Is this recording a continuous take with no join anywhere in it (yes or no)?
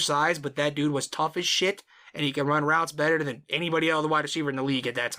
yes